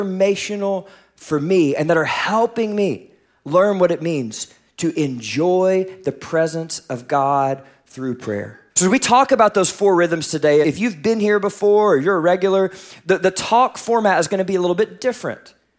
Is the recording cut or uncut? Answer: cut